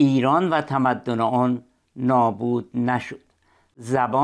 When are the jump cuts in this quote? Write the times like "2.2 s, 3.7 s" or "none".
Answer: none